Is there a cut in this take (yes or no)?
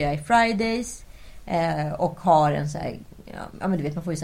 no